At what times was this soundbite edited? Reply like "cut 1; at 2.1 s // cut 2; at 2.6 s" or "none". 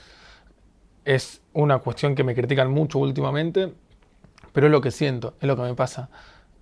none